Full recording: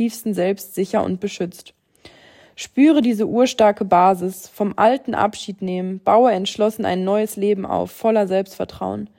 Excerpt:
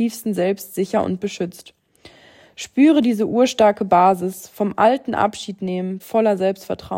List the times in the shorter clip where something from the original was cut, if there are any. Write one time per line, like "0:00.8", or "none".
0:06.0